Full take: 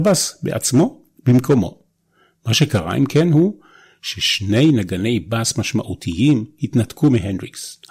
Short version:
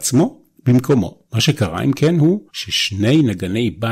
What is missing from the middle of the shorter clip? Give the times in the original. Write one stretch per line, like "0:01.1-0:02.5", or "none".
0:01.8-0:02.4
0:03.6-0:04.0